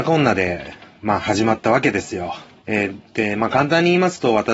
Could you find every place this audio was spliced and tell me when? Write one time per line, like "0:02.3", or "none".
0:02.6